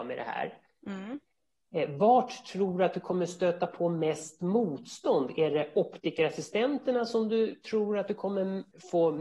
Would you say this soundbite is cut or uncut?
uncut